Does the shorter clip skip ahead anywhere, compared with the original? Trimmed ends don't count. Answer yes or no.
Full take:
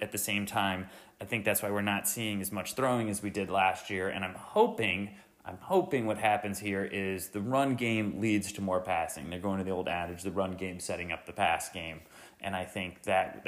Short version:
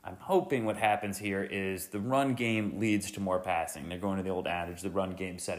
no